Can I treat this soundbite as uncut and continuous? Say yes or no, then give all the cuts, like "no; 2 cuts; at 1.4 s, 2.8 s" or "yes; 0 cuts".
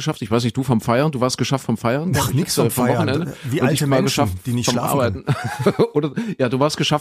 yes; 0 cuts